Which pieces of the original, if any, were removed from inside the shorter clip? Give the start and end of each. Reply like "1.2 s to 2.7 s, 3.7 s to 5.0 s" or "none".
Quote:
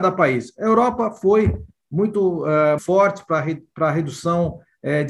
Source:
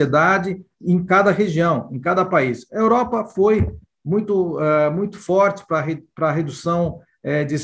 4.9 s to 5.2 s